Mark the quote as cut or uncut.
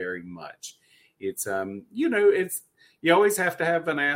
uncut